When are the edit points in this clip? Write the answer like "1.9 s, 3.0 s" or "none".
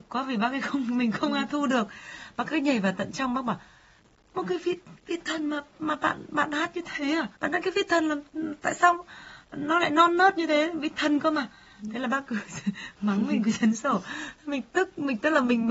7.4 s